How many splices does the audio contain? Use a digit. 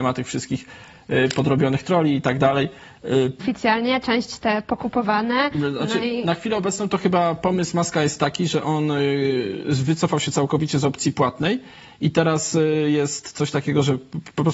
1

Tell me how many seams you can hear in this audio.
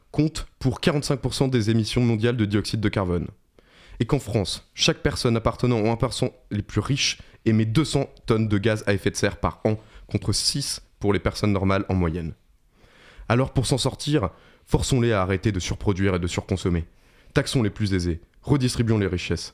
0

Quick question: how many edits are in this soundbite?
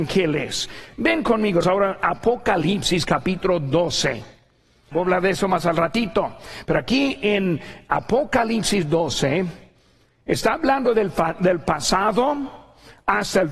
3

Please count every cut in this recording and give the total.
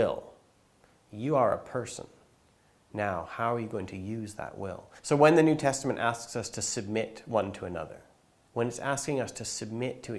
2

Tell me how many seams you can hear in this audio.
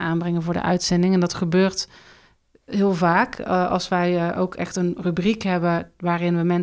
0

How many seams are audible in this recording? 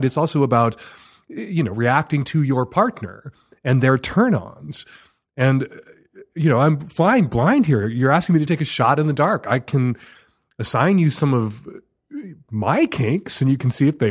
0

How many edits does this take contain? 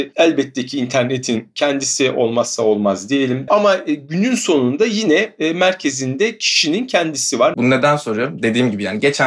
2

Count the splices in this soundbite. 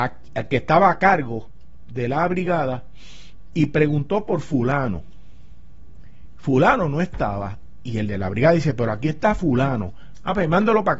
0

